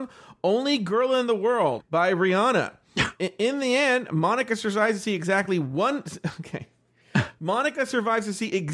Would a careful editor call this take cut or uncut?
cut